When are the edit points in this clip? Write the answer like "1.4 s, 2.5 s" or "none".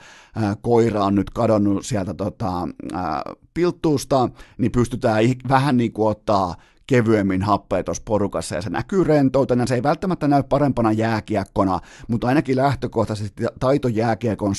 none